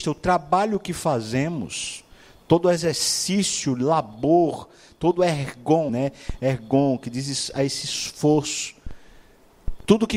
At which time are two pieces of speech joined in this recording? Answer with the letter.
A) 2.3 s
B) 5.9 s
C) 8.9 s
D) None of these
B